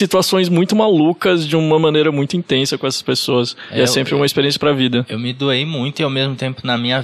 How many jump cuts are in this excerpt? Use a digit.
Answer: 0